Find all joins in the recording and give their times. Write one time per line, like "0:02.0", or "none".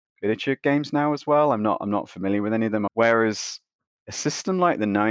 0:02.9